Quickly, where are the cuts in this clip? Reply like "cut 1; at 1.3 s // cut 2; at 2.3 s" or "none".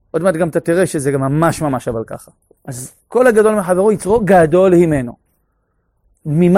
cut 1; at 2.6 s